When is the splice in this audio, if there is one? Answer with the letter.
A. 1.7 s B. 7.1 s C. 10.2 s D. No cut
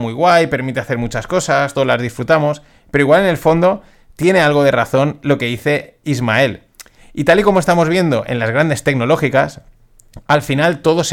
D